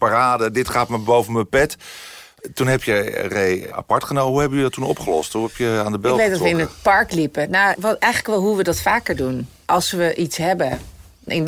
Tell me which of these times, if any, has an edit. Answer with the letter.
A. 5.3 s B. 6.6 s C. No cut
C